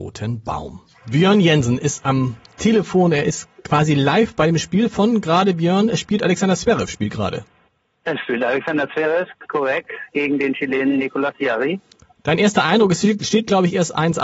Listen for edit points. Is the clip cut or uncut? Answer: uncut